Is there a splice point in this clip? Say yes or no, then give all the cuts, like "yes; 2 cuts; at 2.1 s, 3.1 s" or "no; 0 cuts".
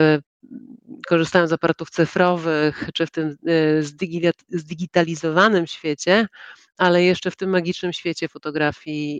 no; 0 cuts